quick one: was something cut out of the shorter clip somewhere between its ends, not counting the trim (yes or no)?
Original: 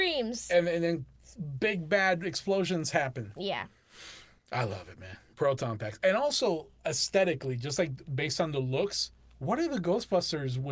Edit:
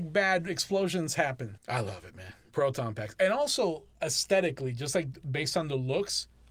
yes